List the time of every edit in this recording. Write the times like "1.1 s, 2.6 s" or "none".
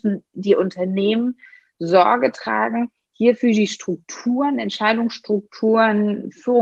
none

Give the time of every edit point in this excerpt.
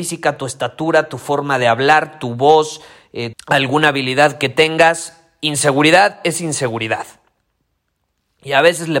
3.3 s

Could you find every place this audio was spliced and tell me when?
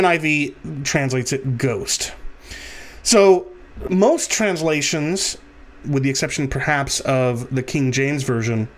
3.9 s, 5.8 s

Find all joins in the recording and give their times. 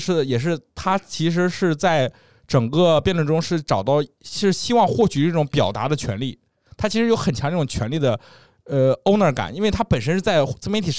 none

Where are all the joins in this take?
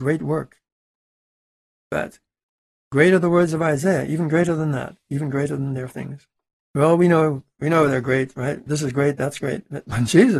6.6 s, 8.7 s

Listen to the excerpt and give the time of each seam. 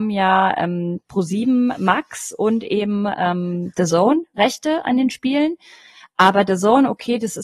none

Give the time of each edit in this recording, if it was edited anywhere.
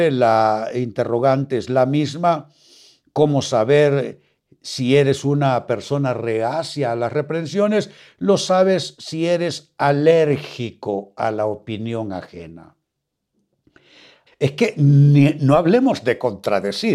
14.3 s

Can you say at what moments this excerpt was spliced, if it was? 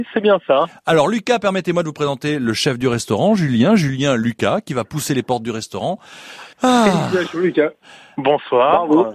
6.5 s

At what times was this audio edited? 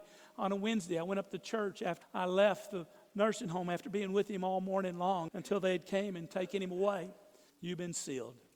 2.0 s, 5.3 s, 7.5 s

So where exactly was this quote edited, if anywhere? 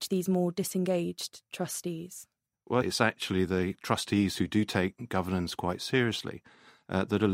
2.8 s

